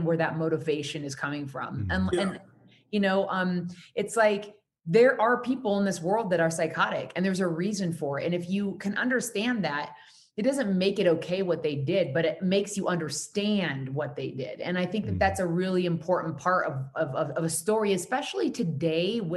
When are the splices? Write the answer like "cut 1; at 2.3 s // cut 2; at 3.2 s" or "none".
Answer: none